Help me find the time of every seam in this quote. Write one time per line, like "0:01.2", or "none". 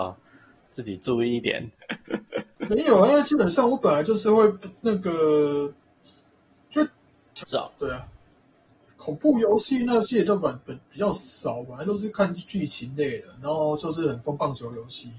0:07.4